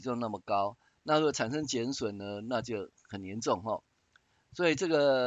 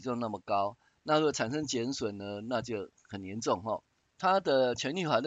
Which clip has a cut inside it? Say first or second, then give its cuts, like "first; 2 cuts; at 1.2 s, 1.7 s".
second; 1 cut; at 4.0 s